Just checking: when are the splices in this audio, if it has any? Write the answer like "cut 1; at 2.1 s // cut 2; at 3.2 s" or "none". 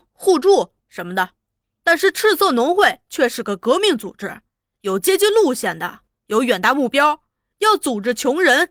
none